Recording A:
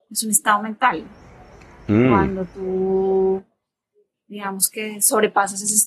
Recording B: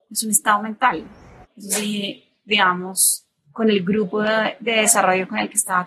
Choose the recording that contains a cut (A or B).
B